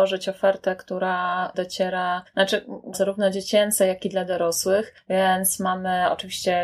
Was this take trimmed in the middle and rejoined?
yes; 1 cut; at 2.9 s

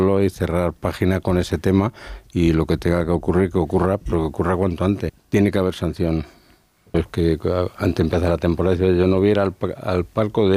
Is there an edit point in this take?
yes; 2 cuts; at 5.1 s, 6.9 s

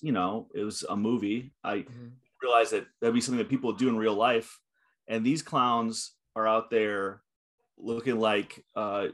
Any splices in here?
no; 0 cuts

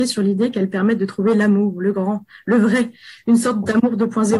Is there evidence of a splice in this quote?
no; 0 cuts

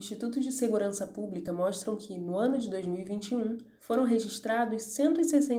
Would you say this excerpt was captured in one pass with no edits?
yes; 0 cuts

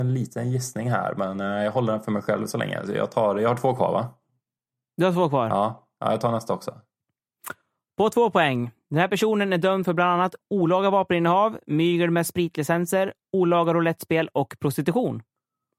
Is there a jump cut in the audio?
no; 0 cuts

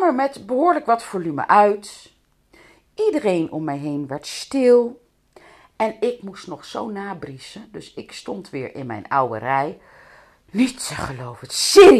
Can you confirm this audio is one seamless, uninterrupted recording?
yes; 0 cuts

